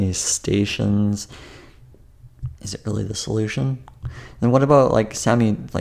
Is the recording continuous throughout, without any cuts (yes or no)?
no